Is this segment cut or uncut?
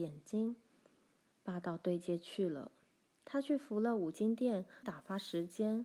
cut